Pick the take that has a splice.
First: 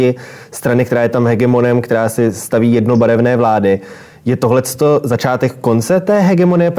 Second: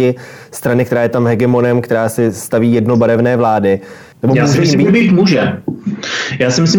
second; 1 cut; at 4.1 s

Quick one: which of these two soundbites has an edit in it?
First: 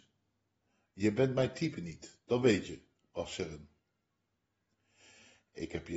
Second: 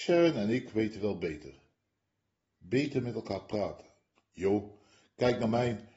second; 1 cut; at 4.2 s

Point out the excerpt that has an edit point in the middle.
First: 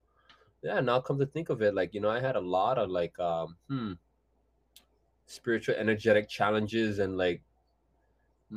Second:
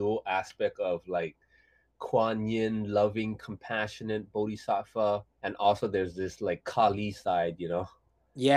second; 1 cut; at 5.3 s

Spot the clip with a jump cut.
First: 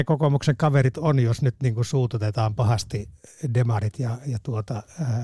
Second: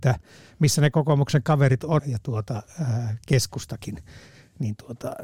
second; 1 cut; at 2.0 s

